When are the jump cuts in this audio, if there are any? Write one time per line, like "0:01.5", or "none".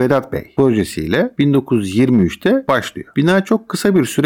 none